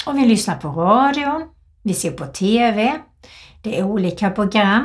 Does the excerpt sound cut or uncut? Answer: uncut